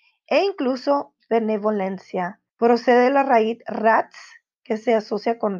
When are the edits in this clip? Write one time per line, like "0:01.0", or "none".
0:02.5